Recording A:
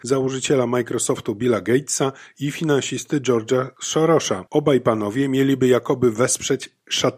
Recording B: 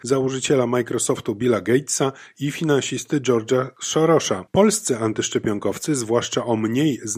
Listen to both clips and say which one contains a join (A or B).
B